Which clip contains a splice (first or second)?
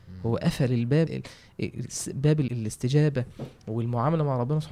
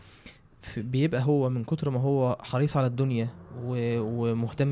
first